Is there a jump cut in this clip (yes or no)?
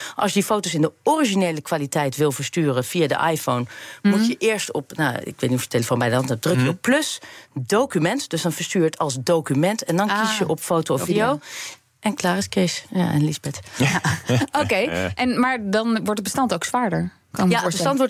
yes